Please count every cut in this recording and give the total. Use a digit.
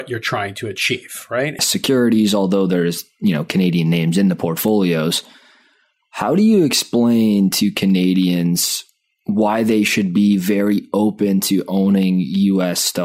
1